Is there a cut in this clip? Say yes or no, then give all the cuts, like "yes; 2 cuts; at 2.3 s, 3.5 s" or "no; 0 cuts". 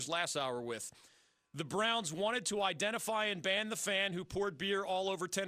no; 0 cuts